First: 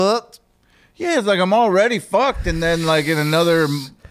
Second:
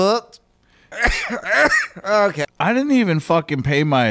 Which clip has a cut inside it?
second; 2 cuts; at 0.9 s, 2.4 s

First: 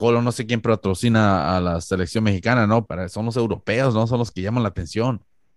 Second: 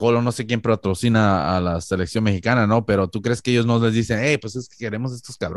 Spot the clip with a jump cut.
first; 1 cut; at 2.9 s

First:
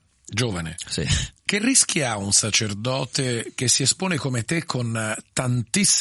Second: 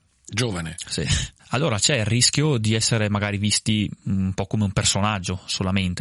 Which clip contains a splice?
second; 1 cut; at 1.4 s

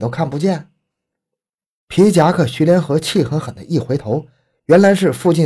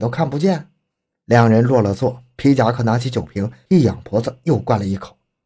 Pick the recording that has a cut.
second; 1 cut; at 1.2 s

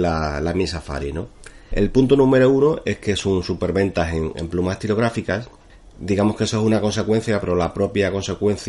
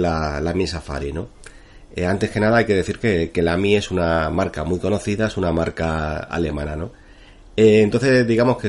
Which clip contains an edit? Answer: first; 1 cut; at 1.7 s

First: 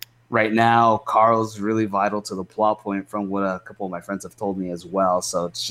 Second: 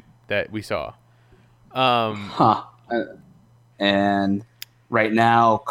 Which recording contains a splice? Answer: second; 1 cut; at 3.7 s

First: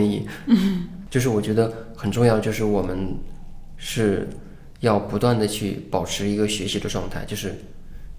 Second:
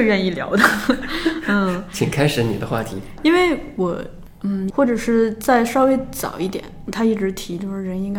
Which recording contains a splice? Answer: second; 2 cuts; at 4.7 s, 6.9 s

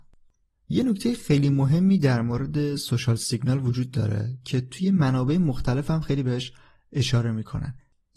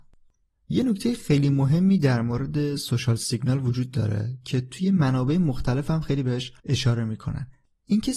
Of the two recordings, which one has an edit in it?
second; 1 cut; at 6.6 s

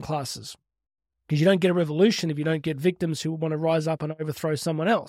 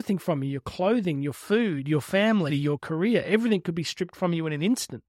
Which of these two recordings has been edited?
second; 1 cut; at 2.5 s

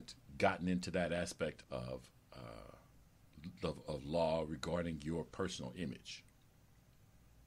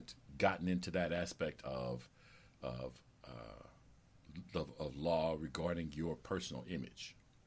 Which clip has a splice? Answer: first; 1 cut; at 1.6 s

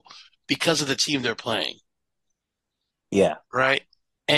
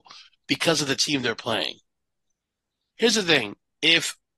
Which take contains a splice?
second; 1 cut; at 3.0 s

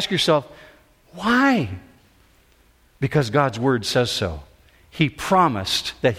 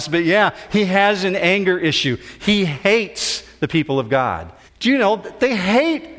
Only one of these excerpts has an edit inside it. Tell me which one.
second; 1 cut; at 4.7 s

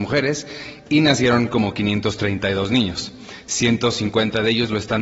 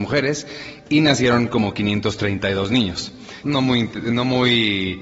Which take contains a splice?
second; 1 cut; at 3.4 s

